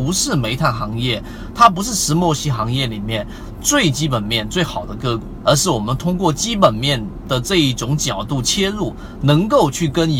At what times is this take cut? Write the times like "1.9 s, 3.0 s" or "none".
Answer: 5.4 s